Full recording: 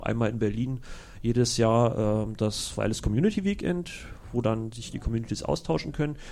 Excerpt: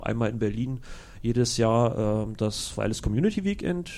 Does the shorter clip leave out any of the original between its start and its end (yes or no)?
no